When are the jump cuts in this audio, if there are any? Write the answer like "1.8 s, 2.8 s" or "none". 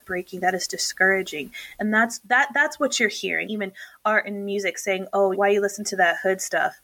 3.4 s, 5.3 s